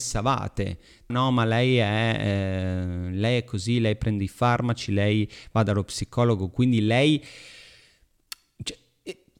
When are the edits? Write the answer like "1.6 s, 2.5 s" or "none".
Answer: 1.1 s

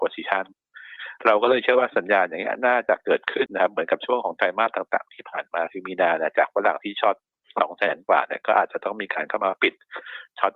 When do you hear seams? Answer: 3.5 s

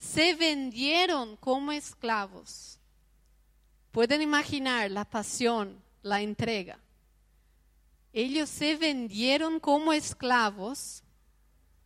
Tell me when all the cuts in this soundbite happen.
none

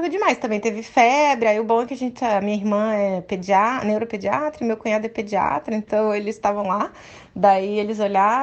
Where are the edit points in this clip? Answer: none

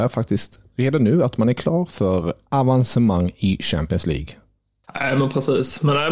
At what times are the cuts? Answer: 4.8 s

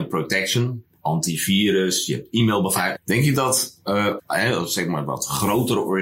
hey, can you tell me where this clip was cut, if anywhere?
2.9 s, 4.2 s

